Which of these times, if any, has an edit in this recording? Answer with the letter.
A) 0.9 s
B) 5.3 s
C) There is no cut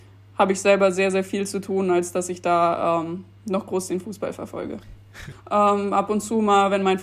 B